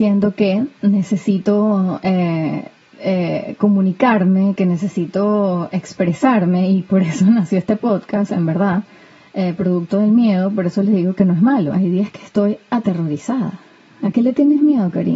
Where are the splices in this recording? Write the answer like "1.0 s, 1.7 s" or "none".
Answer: 11.7 s